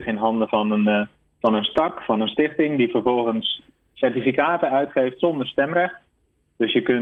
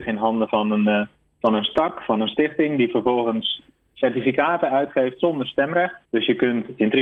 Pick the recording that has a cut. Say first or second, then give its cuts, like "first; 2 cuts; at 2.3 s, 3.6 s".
second; 1 cut; at 6.0 s